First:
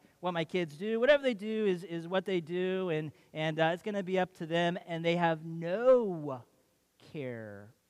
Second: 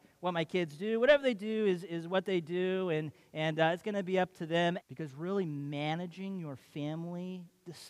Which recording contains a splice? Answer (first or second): second